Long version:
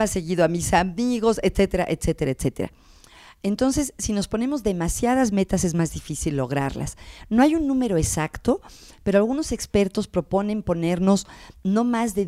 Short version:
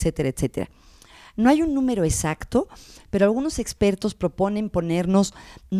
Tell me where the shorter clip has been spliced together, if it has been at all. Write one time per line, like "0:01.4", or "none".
0:01.3